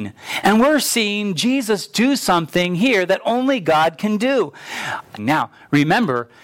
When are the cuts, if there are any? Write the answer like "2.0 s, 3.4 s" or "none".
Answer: 5.2 s